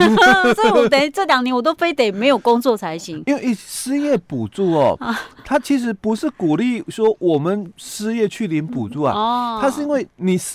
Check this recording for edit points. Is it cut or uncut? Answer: uncut